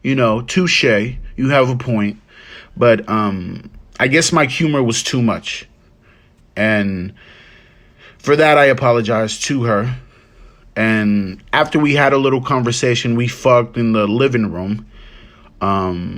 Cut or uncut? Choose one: uncut